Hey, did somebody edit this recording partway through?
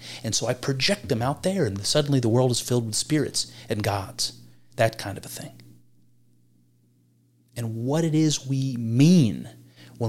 no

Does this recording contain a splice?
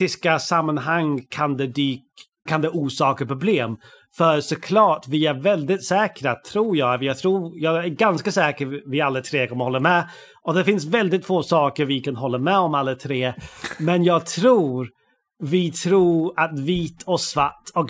yes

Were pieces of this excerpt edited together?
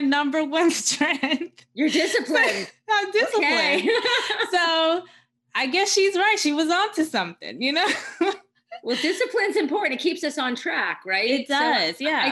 no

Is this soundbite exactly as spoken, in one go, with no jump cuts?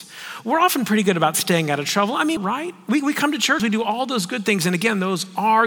no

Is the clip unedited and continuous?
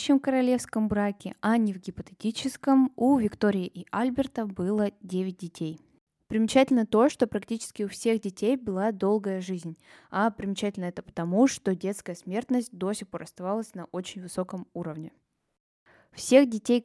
yes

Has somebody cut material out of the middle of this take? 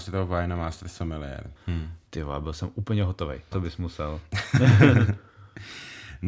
yes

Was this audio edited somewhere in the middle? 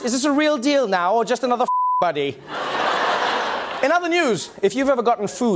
no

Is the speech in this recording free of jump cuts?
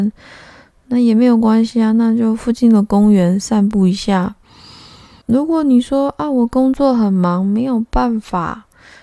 no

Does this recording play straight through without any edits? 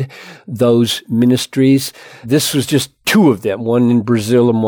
no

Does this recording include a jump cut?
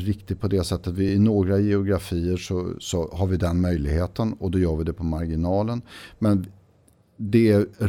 no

